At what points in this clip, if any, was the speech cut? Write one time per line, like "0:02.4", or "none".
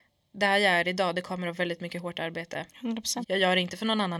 0:03.2